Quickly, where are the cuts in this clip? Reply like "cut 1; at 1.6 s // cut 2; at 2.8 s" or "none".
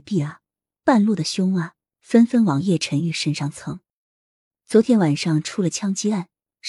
none